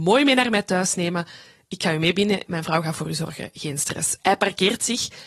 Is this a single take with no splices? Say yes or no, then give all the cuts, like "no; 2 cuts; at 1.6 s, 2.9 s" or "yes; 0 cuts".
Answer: no; 1 cut; at 2.5 s